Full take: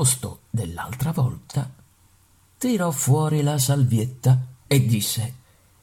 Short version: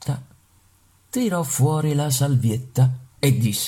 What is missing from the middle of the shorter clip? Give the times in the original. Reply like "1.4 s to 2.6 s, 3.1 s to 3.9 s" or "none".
none